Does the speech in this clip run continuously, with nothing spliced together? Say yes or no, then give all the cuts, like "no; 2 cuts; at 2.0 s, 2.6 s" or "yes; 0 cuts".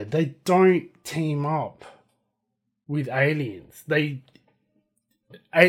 yes; 0 cuts